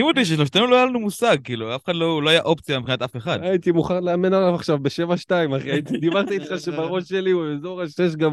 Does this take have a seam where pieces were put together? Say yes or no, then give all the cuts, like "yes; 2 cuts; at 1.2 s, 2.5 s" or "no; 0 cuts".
no; 0 cuts